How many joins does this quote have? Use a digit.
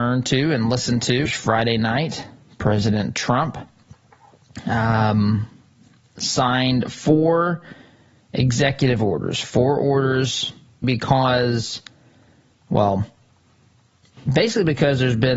2